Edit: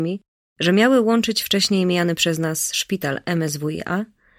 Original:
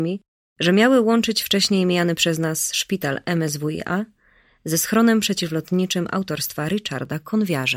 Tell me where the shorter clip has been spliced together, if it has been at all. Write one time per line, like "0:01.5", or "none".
none